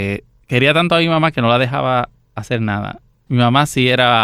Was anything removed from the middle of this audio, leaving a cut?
yes; 1 cut; at 3.3 s

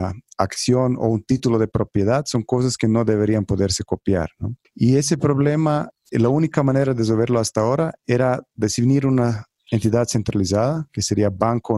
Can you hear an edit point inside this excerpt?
yes; 1 cut; at 4.6 s

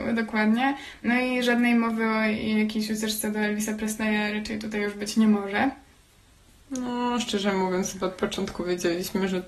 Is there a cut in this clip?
no; 0 cuts

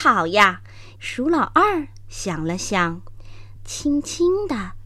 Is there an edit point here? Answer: yes; 2 cuts; at 1.0 s, 3.6 s

